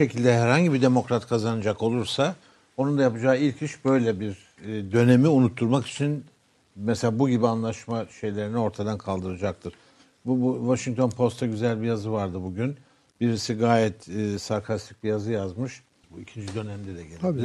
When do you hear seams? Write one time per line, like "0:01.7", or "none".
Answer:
0:16.0